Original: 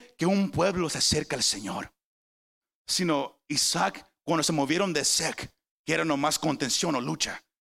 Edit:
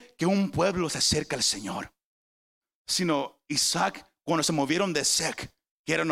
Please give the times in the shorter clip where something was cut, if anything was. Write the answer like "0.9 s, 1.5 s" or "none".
none